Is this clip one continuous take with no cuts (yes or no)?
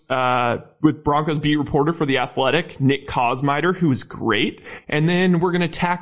yes